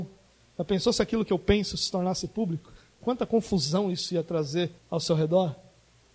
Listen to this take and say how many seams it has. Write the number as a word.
two